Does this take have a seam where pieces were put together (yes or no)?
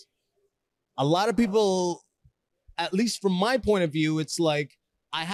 no